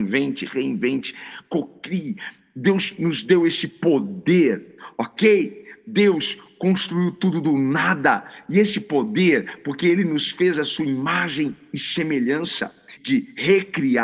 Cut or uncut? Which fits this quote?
cut